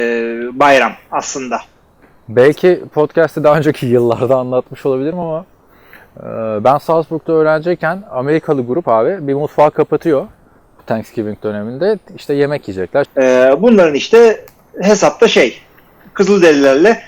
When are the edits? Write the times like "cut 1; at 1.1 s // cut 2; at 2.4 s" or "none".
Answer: cut 1; at 13.0 s